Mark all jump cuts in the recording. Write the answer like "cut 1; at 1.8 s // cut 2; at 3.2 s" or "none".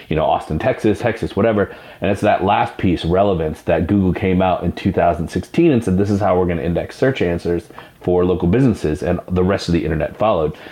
cut 1; at 1.0 s